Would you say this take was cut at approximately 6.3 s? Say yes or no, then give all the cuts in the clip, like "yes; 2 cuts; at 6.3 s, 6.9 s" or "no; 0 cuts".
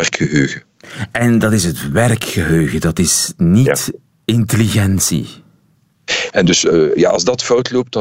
yes; 1 cut; at 6.3 s